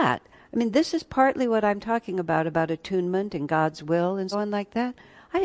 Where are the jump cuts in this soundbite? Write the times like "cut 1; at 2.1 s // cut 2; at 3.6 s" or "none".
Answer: cut 1; at 4.3 s